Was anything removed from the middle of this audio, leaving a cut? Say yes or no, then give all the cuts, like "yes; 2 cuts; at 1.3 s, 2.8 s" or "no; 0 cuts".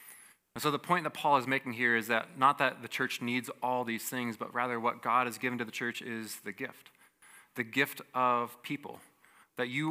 no; 0 cuts